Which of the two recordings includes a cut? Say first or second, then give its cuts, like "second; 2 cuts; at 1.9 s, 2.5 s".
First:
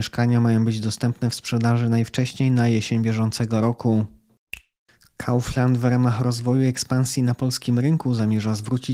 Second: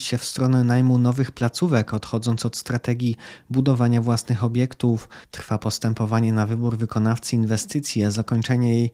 second; 1 cut; at 5.2 s